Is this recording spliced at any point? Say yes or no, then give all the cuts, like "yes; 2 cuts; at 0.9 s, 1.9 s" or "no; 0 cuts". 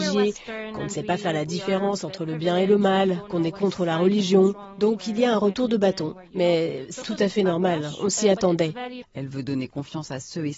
yes; 2 cuts; at 7.0 s, 9.0 s